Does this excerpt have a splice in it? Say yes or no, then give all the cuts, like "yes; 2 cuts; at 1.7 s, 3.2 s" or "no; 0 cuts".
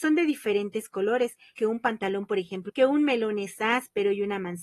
yes; 2 cuts; at 1.6 s, 2.7 s